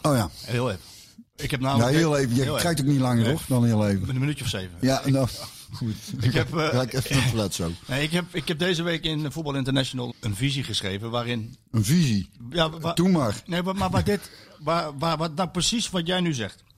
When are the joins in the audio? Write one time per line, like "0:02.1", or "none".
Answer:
0:10.1